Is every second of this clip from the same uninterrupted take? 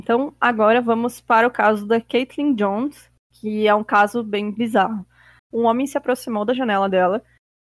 no; 1 cut; at 5.4 s

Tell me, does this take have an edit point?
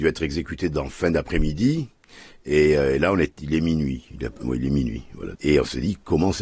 yes; 1 cut; at 5.4 s

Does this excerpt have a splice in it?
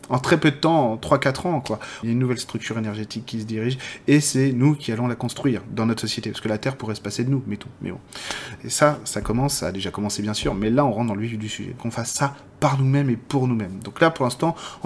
yes; 3 cuts; at 2.0 s, 8.6 s, 11.8 s

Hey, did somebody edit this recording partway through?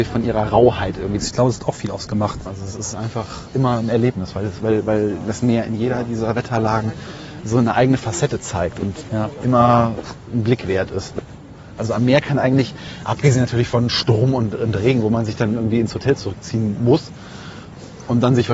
yes; 3 cuts; at 1.2 s, 2.5 s, 11.8 s

